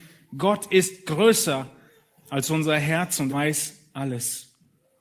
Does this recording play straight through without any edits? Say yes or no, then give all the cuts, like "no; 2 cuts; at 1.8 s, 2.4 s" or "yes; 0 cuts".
no; 1 cut; at 3.3 s